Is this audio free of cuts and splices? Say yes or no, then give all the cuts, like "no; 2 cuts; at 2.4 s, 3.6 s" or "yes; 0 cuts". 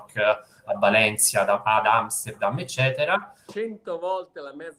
no; 1 cut; at 3.5 s